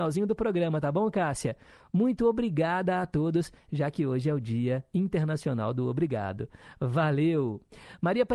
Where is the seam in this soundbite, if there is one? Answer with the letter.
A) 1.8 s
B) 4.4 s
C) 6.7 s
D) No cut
D